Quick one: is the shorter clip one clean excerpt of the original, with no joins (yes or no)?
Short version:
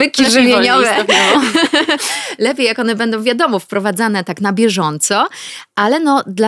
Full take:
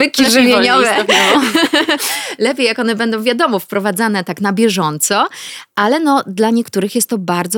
yes